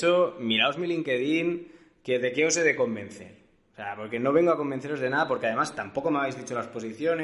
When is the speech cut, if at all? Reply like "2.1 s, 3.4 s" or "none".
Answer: none